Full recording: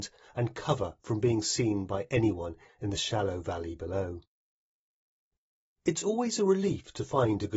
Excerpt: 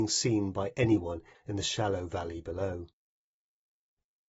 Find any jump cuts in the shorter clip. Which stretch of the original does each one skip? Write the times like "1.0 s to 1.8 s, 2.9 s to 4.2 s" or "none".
none